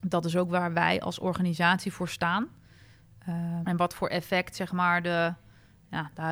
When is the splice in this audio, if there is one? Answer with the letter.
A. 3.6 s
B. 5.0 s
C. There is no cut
A